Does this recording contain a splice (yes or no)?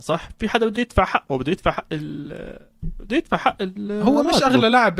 no